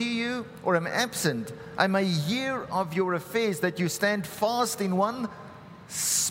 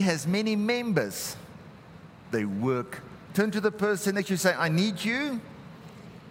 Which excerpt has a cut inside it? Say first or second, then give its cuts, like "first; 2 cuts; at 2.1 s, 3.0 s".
second; 2 cuts; at 2.2 s, 3.3 s